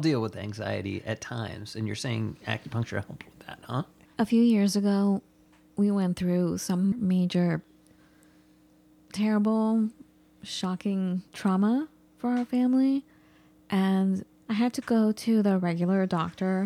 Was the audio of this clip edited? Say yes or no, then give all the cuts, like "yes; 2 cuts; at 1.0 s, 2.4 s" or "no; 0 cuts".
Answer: yes; 3 cuts; at 4.1 s, 6.9 s, 11.3 s